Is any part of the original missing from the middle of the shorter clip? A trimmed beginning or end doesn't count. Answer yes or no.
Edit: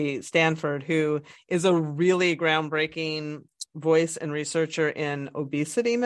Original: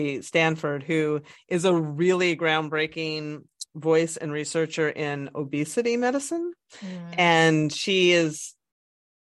no